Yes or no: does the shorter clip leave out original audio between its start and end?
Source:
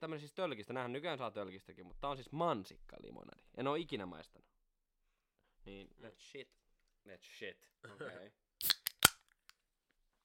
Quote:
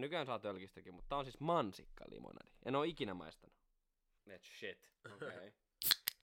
yes